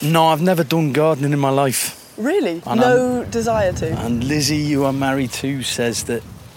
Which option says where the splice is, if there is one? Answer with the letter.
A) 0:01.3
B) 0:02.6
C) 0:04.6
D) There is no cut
B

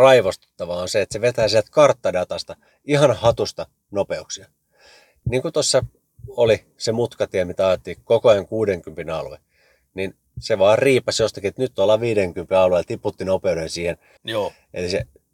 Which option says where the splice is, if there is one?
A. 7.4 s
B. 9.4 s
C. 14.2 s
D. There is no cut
C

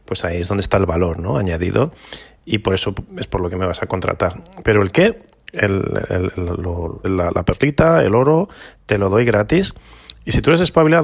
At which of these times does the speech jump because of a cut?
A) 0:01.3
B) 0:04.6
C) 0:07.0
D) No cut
C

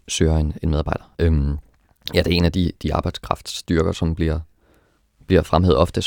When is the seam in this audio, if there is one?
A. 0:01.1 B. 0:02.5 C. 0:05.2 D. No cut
A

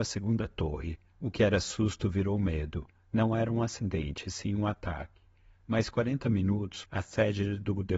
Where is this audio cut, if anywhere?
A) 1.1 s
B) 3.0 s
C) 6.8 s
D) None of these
C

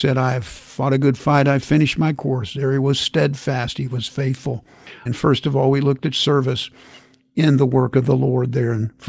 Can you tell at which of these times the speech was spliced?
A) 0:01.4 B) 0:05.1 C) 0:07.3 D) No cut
B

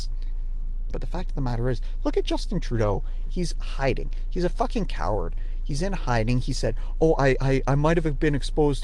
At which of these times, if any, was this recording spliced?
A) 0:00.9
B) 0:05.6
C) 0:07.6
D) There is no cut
A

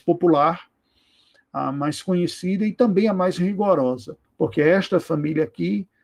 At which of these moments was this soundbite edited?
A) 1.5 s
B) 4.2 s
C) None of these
B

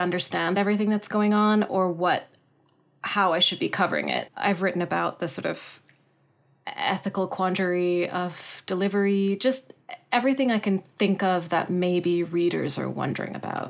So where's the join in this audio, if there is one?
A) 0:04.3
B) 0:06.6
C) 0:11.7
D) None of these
A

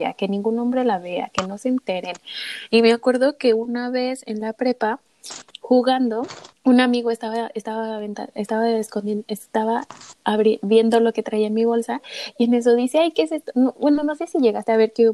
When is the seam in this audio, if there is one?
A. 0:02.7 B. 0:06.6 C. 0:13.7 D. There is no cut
B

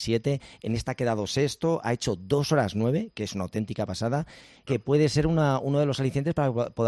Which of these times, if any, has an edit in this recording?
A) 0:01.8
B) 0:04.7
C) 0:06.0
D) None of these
B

